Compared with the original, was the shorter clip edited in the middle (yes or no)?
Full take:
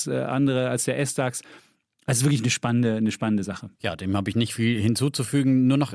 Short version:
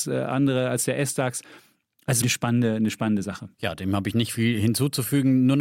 yes